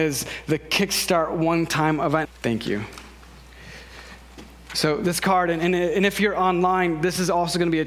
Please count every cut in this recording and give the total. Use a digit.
1